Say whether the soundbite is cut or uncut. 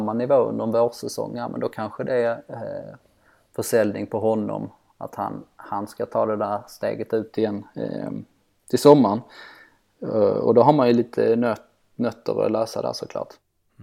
uncut